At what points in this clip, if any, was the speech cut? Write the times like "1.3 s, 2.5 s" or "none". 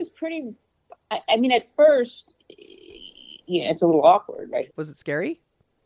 4.7 s